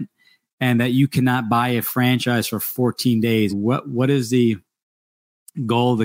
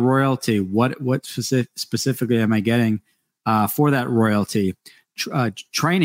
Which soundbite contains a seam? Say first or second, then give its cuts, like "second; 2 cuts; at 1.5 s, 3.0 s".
first; 1 cut; at 3.5 s